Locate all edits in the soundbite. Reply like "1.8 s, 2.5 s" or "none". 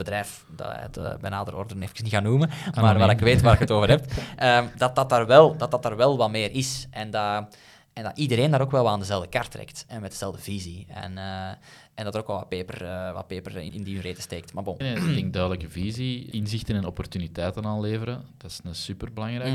13.7 s, 14.8 s, 16.3 s